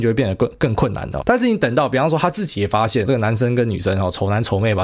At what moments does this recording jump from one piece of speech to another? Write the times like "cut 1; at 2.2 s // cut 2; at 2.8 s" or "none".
cut 1; at 1.2 s // cut 2; at 3.1 s